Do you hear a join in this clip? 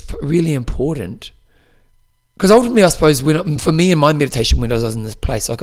no; 0 cuts

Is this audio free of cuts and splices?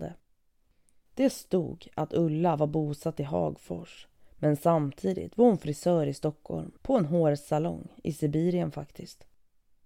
no; 1 cut; at 6.8 s

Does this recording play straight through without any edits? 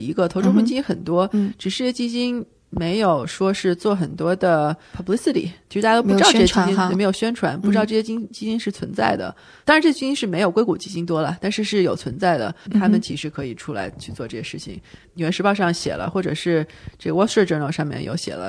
no; 1 cut; at 12.7 s

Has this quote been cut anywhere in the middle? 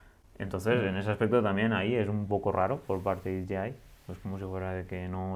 no; 0 cuts

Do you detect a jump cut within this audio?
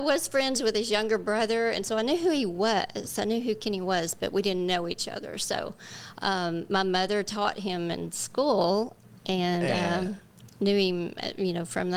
no; 0 cuts

